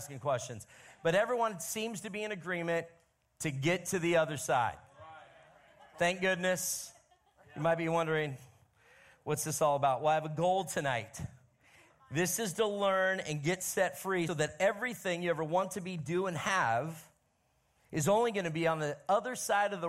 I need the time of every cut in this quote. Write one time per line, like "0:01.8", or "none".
0:14.3